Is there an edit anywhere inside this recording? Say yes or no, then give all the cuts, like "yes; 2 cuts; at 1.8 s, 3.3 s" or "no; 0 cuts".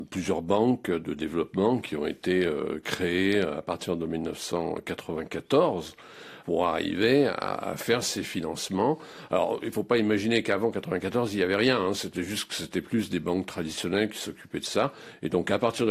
no; 0 cuts